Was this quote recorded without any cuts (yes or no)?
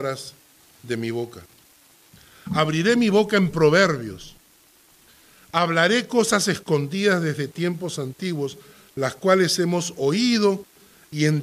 yes